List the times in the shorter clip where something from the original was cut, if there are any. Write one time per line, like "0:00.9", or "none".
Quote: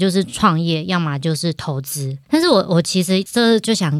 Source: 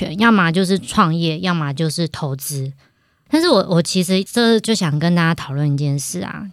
0:02.2